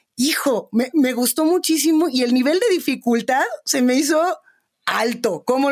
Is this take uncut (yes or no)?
yes